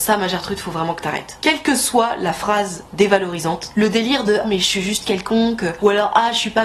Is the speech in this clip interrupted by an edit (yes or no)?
yes